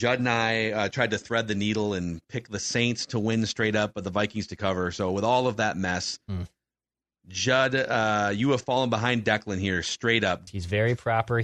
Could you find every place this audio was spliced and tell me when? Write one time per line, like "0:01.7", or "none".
0:10.5